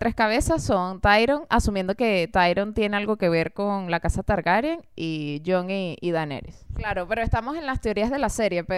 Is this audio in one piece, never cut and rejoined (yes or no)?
no